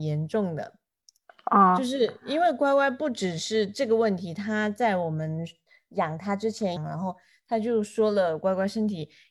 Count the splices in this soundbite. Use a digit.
1